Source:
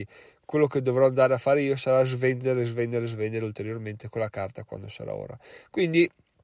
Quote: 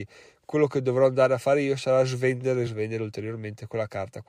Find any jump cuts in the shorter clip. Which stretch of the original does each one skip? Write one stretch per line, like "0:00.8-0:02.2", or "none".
0:02.7-0:03.1

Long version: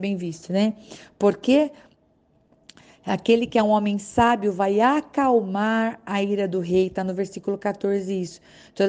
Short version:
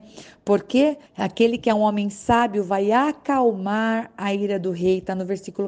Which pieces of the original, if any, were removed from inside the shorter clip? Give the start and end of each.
0:01.8-0:02.9

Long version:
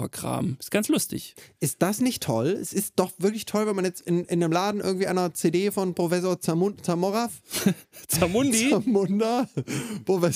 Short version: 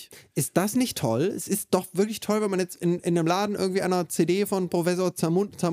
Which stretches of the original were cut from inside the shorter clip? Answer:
none

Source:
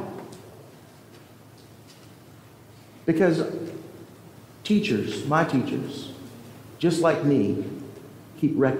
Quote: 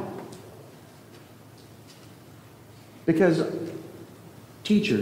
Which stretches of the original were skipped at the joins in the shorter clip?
none

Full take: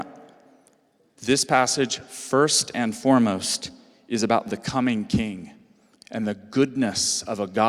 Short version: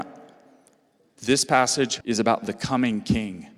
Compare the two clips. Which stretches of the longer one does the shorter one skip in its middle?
0:02.0-0:04.0

